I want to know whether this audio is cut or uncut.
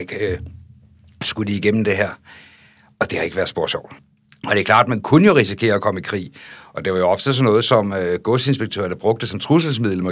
uncut